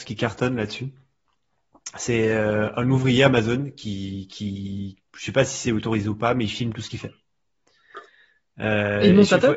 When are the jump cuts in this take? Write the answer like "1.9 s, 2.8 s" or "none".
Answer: none

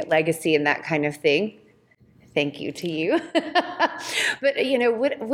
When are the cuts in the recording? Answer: none

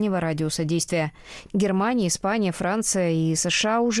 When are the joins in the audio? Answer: 1.5 s

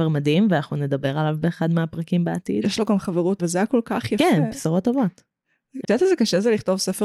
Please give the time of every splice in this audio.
3.4 s, 5.8 s

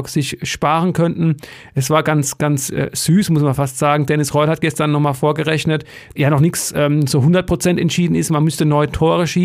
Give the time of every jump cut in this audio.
6.2 s

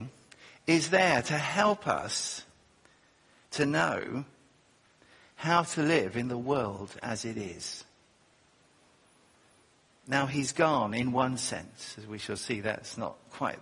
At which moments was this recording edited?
none

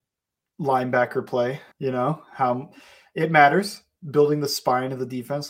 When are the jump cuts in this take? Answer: 1.7 s

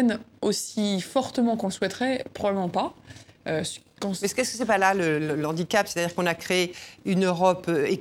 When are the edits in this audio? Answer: none

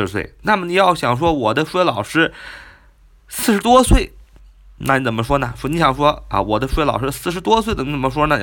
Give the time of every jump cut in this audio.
none

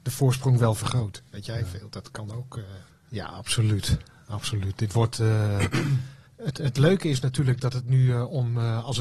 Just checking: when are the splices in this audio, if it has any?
2.9 s

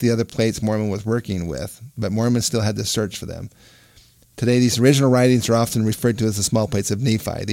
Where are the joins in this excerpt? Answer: none

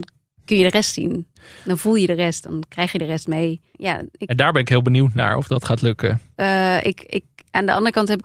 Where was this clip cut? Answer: 3.7 s, 6.4 s

